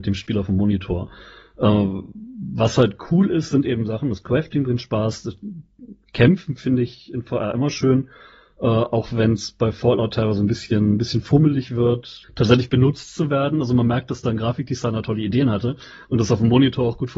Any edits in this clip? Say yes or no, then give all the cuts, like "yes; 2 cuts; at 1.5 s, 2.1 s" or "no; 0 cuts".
yes; 1 cut; at 12.2 s